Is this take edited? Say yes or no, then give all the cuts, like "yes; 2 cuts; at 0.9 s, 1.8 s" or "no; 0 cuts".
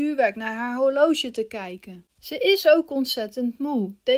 yes; 1 cut; at 2.1 s